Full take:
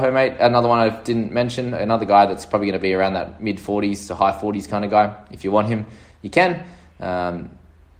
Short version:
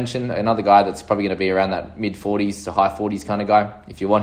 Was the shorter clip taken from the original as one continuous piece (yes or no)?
yes